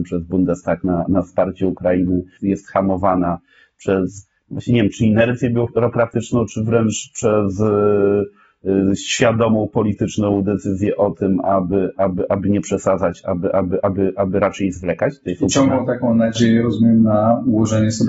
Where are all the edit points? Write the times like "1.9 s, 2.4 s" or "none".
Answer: 2.4 s